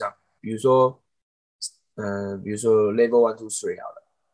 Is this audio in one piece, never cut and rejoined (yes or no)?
yes